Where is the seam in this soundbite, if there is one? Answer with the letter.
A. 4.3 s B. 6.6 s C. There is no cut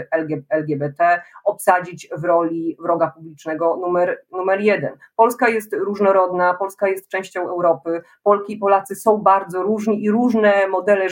C